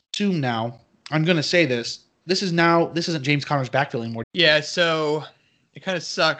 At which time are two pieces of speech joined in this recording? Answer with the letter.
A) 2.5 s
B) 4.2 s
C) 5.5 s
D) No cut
B